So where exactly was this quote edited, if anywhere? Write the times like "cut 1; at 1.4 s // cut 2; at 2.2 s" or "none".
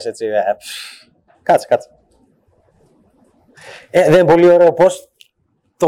cut 1; at 1.3 s